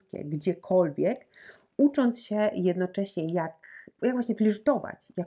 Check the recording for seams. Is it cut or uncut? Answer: cut